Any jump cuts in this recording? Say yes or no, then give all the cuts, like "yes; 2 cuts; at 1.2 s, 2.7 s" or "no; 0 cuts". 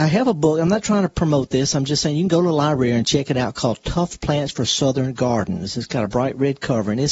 no; 0 cuts